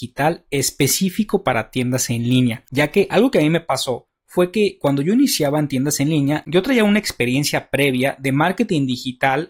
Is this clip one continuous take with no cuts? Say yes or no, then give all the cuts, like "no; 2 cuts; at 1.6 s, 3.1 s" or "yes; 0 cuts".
yes; 0 cuts